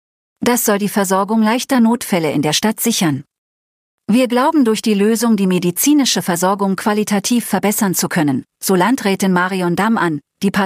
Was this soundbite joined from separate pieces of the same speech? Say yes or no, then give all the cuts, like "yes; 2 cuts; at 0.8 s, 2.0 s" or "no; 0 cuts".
no; 0 cuts